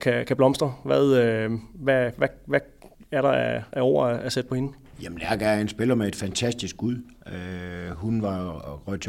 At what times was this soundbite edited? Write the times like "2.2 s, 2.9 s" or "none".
none

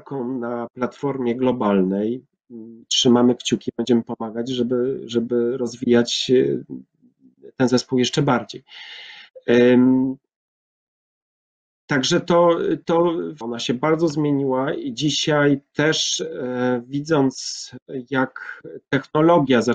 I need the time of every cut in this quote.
2.8 s, 13.4 s

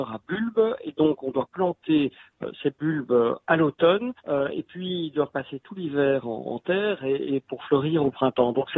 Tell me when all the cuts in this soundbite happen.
4.2 s

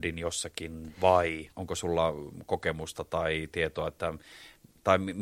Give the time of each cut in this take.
1.5 s

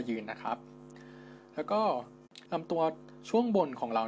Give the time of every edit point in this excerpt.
2.5 s

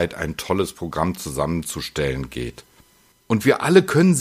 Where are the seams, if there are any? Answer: 3.1 s

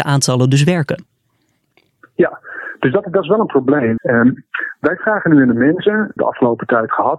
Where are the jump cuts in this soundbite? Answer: 4.0 s, 6.2 s

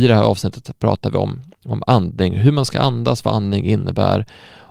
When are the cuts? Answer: none

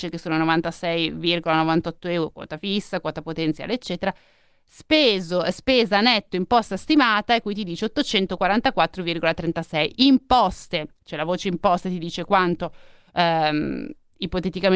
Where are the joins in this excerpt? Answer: none

